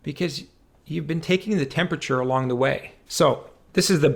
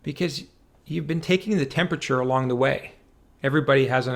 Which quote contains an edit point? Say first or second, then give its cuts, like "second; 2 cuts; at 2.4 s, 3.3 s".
first; 1 cut; at 3.1 s